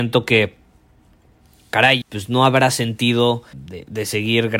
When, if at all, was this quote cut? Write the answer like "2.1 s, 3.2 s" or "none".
2.0 s, 3.5 s